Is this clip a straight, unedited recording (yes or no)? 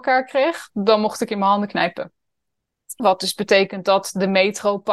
no